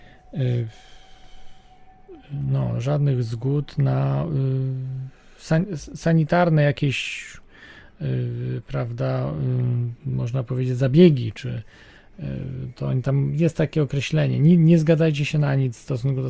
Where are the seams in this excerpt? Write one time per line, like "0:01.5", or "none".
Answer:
none